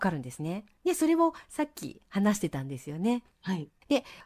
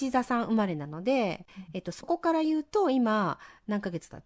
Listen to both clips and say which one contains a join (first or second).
first